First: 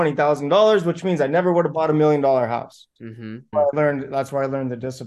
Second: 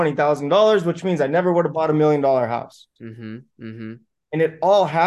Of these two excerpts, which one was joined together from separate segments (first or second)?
first